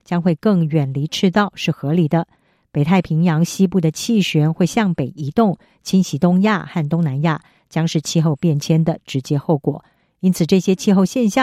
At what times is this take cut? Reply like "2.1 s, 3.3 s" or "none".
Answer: none